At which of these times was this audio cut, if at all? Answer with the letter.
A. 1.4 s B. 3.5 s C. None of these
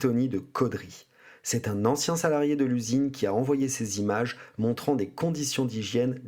C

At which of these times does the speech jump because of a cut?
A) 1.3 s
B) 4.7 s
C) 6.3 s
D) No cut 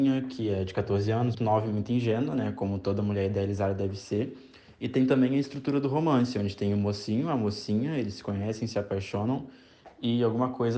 A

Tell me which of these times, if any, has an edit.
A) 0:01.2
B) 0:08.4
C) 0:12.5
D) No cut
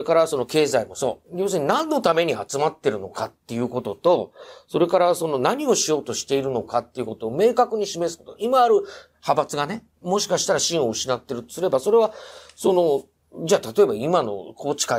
A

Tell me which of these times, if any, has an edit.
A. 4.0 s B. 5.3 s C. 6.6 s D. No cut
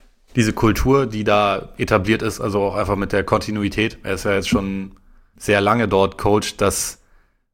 B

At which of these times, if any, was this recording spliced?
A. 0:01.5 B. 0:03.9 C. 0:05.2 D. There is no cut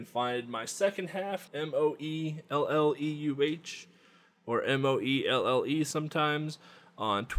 A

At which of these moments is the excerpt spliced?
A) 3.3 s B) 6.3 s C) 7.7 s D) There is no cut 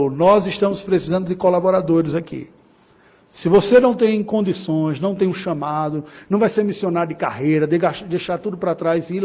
D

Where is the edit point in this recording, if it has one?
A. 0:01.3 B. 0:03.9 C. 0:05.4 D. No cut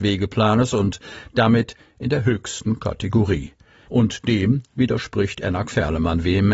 B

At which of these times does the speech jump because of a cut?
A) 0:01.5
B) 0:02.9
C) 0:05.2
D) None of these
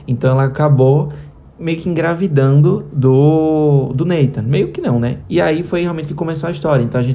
C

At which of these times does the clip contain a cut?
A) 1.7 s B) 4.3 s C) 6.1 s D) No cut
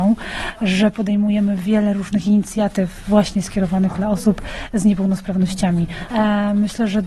C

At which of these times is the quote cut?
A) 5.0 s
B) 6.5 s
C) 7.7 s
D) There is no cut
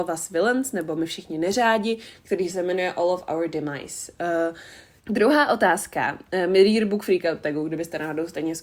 A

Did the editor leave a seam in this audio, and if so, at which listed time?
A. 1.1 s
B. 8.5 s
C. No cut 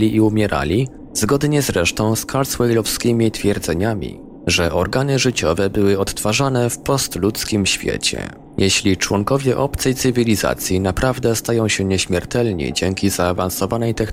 A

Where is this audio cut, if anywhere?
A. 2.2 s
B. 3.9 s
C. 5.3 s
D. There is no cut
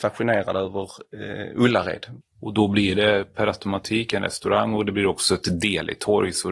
A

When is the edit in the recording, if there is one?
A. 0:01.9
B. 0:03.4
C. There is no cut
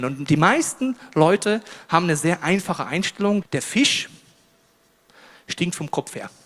B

